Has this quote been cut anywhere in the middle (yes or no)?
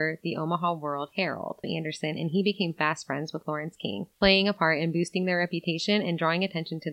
yes